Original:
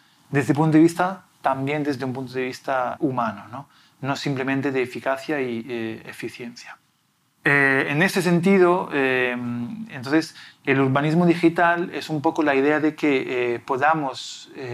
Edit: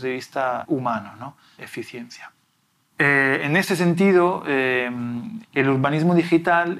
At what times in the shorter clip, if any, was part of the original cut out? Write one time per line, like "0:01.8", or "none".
0:01.6
0:05.4